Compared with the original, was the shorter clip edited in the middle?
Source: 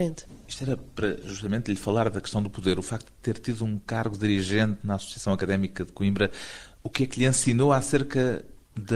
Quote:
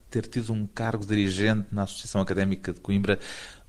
no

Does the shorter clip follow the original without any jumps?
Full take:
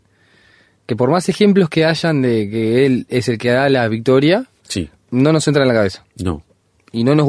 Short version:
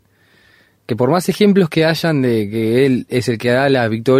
yes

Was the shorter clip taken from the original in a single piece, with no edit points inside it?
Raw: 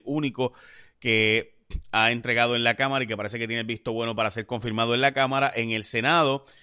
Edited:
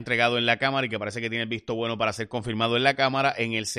yes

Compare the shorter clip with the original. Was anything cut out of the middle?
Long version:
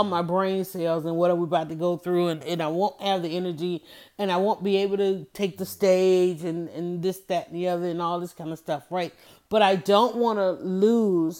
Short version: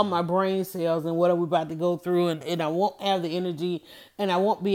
no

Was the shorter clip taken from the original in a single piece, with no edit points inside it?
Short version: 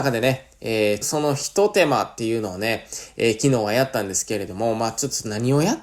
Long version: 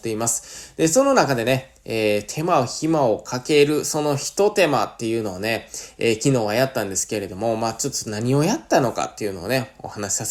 no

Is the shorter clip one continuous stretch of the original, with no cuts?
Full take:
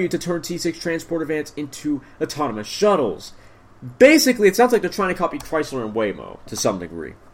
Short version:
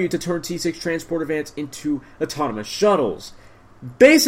yes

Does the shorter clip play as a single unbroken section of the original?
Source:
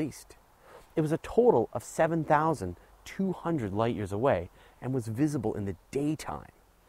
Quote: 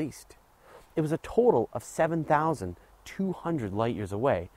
yes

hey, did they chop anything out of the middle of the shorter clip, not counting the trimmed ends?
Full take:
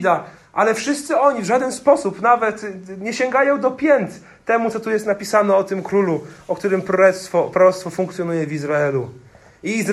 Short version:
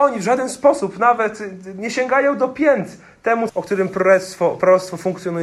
yes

